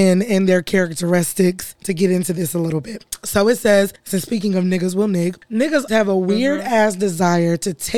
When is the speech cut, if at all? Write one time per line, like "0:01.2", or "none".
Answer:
0:01.7
0:05.9